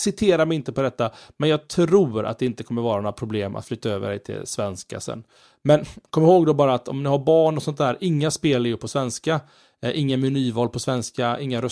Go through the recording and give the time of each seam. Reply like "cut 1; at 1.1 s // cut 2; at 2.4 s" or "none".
none

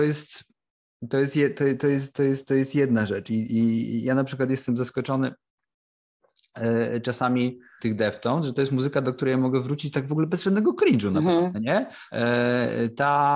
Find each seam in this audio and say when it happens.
cut 1; at 7.8 s // cut 2; at 12.1 s

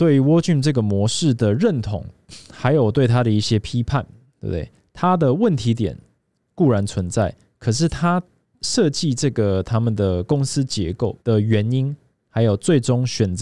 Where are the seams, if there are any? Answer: cut 1; at 8.6 s // cut 2; at 11.2 s

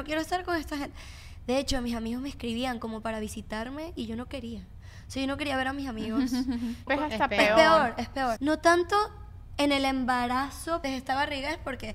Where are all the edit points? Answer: cut 1; at 6.9 s // cut 2; at 8.4 s // cut 3; at 10.8 s

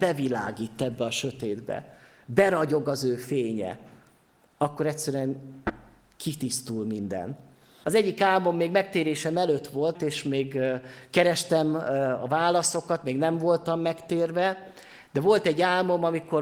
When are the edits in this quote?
cut 1; at 7.8 s // cut 2; at 9.9 s

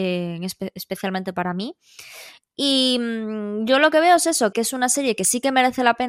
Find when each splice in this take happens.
cut 1; at 4.5 s

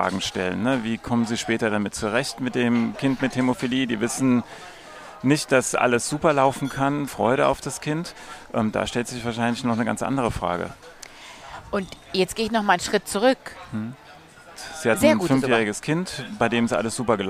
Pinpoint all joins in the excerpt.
cut 1; at 7.1 s // cut 2; at 14.5 s

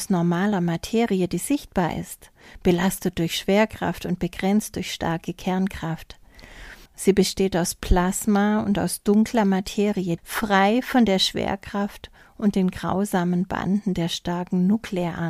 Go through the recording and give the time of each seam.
cut 1; at 6.9 s // cut 2; at 10.2 s

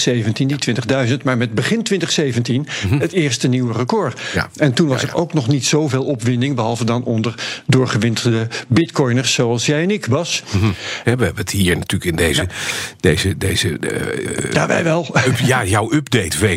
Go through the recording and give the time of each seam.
cut 1; at 11.0 s

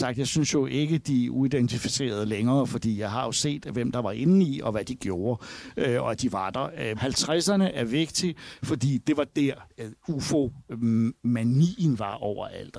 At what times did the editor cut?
cut 1; at 7.0 s // cut 2; at 9.7 s

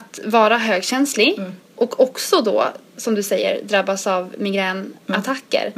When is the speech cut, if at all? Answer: none

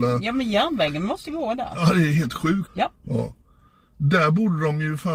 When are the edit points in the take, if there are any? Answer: cut 1; at 2.7 s

